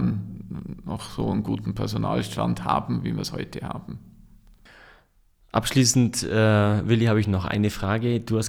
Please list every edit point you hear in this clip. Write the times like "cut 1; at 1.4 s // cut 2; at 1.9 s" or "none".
none